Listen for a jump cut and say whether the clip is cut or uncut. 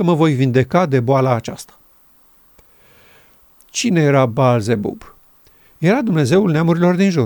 uncut